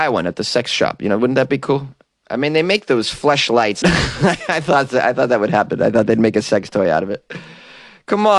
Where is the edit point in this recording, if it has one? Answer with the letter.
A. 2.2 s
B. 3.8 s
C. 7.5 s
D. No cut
B